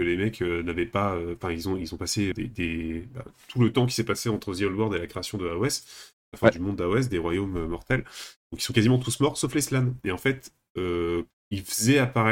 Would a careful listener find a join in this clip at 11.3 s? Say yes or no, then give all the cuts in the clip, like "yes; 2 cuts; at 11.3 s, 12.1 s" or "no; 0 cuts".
yes; 2 cuts; at 2.3 s, 11.3 s